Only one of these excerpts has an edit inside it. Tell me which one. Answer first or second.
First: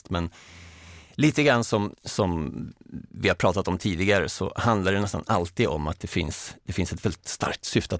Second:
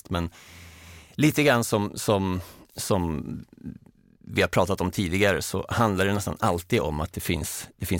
first